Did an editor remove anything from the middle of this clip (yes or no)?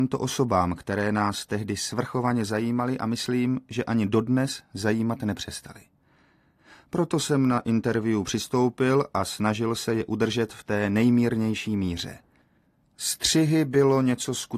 no